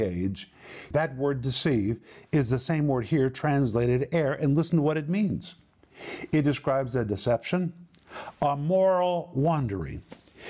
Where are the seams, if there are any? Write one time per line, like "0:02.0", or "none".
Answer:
0:00.9